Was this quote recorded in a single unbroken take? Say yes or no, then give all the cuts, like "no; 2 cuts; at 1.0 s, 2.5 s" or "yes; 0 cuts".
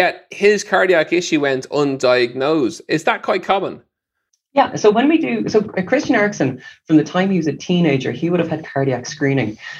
yes; 0 cuts